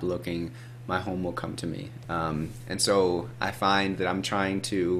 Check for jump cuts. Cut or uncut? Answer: cut